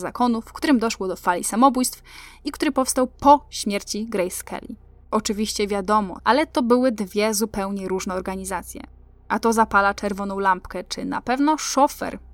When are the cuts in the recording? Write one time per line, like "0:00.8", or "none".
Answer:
0:05.0
0:06.2